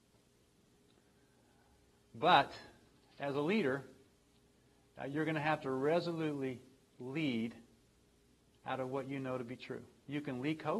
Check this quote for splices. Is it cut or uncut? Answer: uncut